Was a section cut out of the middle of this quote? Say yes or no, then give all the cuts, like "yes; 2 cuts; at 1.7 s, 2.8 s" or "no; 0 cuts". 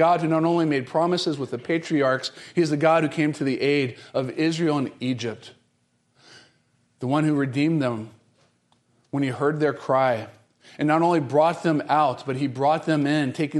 no; 0 cuts